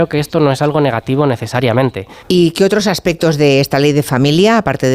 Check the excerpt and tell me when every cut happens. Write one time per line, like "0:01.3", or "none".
0:02.2